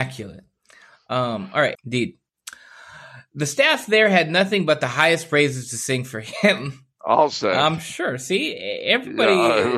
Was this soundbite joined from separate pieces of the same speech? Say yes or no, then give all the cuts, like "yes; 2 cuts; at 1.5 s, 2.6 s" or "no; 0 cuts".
yes; 1 cut; at 1.7 s